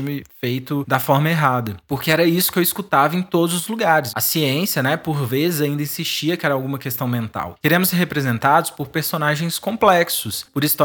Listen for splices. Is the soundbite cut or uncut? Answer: cut